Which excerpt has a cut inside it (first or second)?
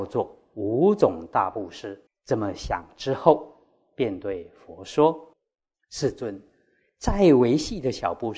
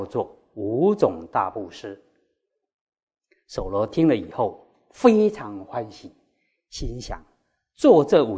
first